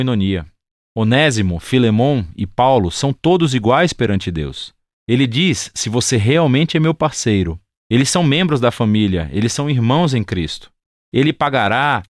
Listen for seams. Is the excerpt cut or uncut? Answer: cut